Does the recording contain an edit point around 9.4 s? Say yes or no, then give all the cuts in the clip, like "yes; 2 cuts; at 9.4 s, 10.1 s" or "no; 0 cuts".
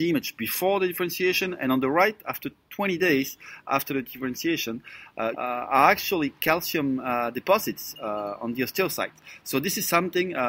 no; 1 cut; at 5.3 s